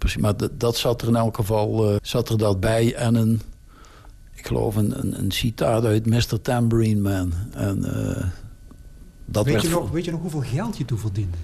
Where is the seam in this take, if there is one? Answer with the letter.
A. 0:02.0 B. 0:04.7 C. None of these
A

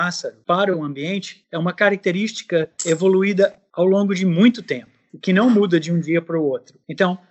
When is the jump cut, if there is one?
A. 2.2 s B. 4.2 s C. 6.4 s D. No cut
D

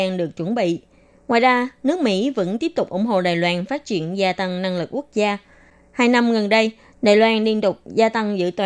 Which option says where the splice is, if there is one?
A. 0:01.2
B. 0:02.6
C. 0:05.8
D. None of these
D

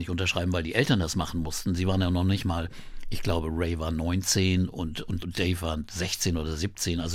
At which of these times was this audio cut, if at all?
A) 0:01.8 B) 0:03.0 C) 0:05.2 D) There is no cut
C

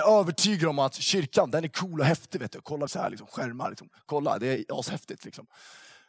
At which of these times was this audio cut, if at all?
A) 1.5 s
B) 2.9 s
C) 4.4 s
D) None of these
B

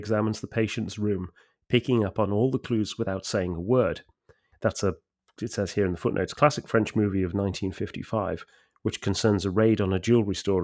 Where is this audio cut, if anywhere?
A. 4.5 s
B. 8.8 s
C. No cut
A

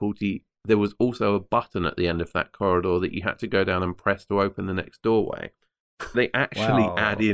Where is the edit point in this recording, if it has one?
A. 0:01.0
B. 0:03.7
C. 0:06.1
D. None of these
C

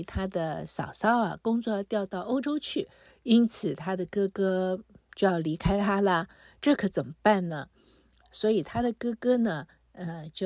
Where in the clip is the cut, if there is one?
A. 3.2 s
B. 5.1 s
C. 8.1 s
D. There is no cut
D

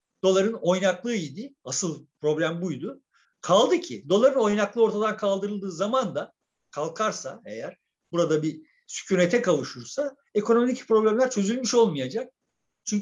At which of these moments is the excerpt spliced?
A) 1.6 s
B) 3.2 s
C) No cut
B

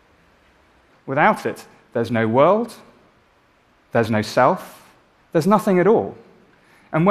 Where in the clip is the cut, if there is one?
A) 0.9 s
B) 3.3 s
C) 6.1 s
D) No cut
A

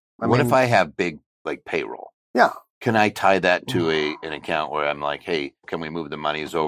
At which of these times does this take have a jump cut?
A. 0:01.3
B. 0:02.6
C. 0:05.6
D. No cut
C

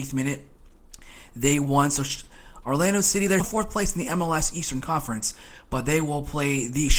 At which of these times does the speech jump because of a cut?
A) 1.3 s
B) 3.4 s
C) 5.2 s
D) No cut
B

